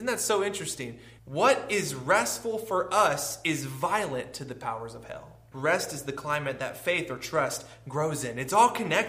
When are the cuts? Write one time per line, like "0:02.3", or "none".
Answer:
0:01.2
0:05.5